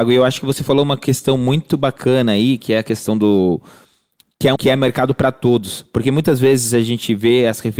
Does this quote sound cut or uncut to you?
cut